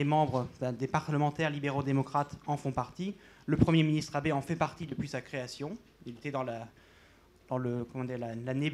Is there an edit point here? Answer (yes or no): no